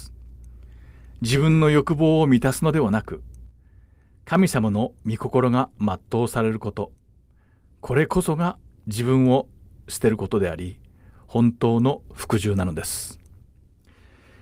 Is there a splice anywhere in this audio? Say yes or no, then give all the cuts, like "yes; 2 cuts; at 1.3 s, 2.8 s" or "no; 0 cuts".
no; 0 cuts